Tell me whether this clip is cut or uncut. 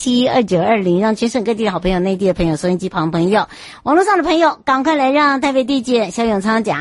uncut